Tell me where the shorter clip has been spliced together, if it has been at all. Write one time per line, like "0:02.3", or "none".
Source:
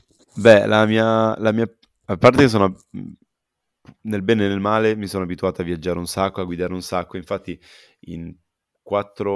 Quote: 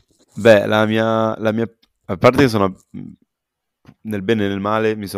none